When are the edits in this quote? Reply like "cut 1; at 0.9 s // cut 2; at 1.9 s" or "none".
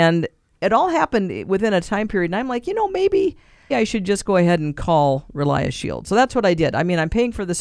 cut 1; at 3.7 s